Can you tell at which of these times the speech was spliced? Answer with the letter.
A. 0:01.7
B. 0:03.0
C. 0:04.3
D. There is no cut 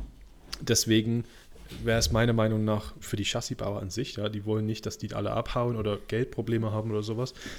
B